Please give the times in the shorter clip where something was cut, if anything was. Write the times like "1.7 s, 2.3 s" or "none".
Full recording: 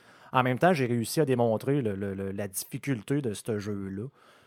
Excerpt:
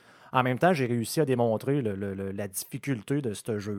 none